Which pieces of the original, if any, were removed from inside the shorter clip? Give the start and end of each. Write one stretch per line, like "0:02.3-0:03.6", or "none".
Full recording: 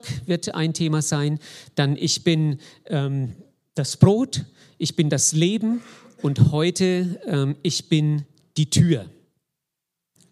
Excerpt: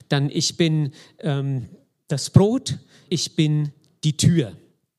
0:04.7-0:07.6